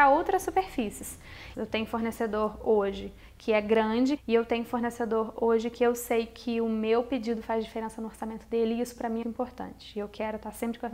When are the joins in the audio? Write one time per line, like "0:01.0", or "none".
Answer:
0:01.5
0:04.2
0:09.2

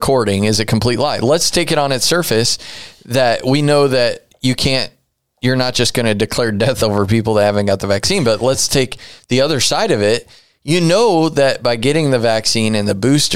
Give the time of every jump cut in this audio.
none

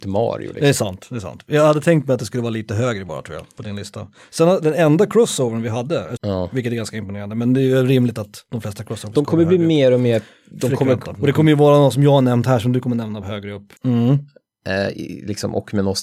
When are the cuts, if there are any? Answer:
0:06.2
0:11.1
0:13.8

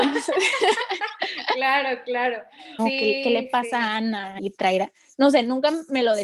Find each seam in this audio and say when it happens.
0:02.8
0:04.4

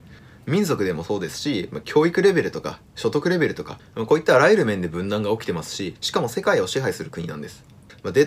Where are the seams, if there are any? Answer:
none

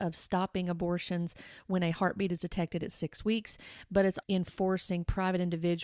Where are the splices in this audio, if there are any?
0:04.2

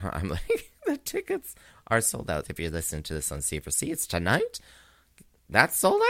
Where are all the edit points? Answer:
0:02.4

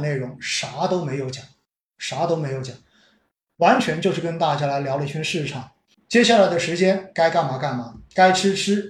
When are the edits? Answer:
0:05.9

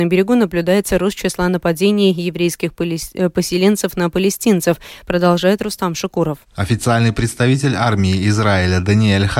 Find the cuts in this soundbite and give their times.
0:06.4

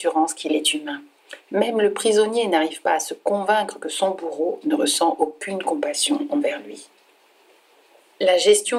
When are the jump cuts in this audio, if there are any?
none

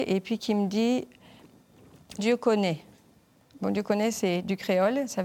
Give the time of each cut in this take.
0:02.2

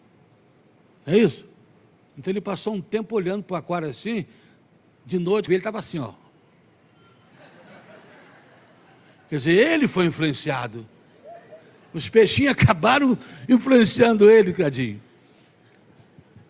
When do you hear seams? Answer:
0:02.1
0:05.5

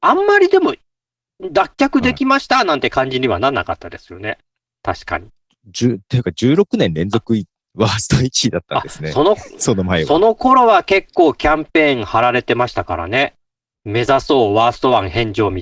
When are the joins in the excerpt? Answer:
none

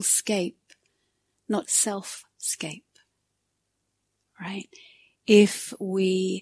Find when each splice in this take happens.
0:01.6

